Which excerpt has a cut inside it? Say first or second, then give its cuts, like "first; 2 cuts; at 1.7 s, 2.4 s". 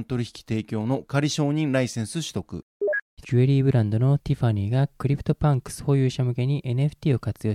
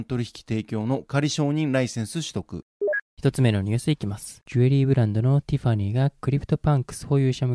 first; 1 cut; at 3.2 s